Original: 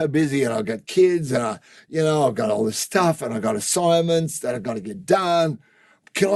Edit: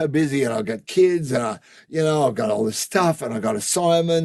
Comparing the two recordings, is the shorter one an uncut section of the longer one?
yes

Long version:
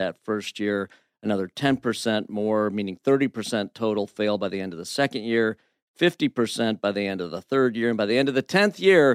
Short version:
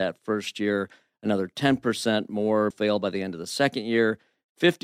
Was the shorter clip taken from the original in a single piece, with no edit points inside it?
no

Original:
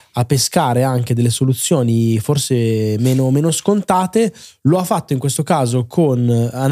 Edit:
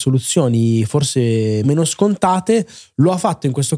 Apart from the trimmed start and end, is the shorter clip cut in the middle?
yes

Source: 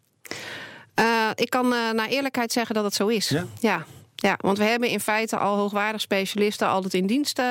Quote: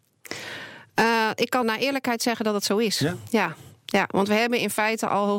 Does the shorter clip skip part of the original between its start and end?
yes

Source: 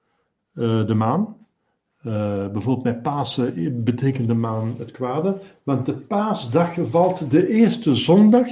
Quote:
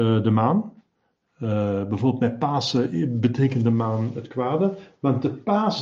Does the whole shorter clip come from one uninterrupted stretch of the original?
yes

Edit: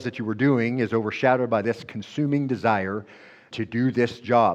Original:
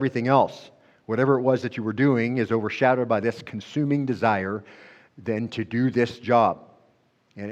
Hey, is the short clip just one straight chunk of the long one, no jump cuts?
no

